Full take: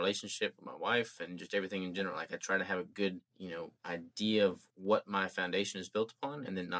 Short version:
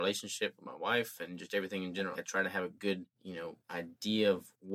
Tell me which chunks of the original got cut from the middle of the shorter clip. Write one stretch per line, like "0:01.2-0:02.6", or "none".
0:02.1-0:02.3

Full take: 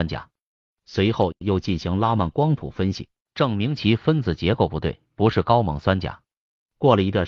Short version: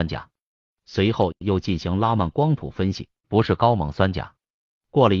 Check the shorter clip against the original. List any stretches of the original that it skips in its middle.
0:03.2-0:05.1

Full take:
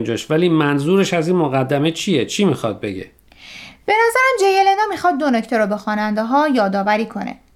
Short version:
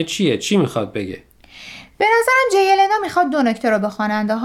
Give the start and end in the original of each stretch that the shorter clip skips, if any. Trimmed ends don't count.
none

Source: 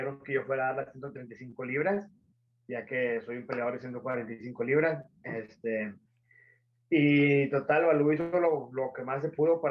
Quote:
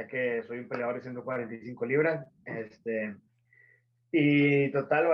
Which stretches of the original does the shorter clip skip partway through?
none

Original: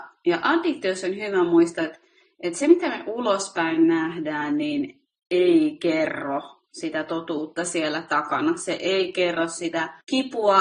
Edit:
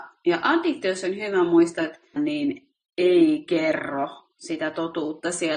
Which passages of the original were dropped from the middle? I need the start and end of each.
0:02.2-0:04.5

